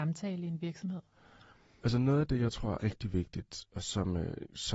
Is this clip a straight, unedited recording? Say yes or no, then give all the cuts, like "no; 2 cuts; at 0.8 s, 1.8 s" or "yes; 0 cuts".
no; 1 cut; at 2.8 s